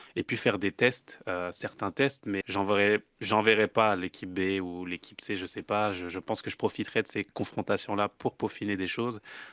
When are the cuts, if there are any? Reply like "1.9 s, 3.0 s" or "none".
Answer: 2.4 s